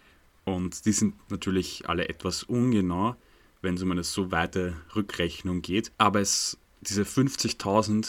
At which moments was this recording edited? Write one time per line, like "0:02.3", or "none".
0:05.9